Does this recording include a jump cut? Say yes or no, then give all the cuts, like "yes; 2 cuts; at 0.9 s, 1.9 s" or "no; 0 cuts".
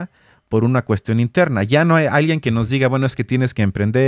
no; 0 cuts